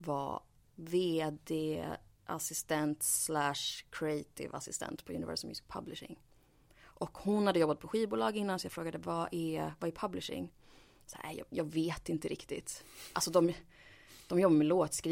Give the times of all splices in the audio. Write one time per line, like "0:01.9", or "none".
none